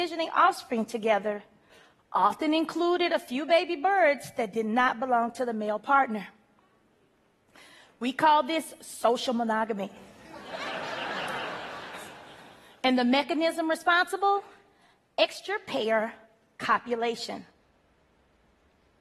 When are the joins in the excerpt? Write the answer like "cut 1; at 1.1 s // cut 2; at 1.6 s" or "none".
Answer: none